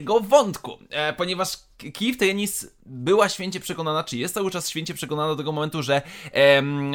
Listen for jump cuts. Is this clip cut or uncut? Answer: uncut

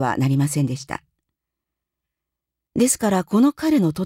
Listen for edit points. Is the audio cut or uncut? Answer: uncut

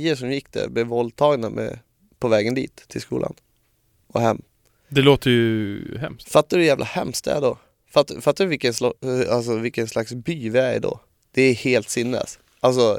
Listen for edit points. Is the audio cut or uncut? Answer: uncut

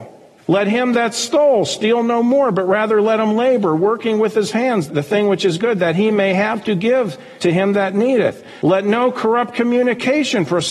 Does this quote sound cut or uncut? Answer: uncut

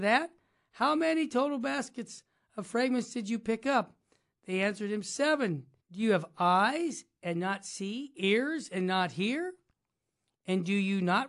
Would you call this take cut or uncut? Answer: cut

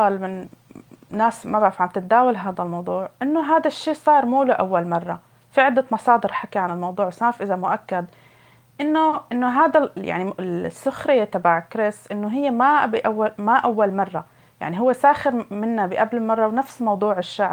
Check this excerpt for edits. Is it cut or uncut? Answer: uncut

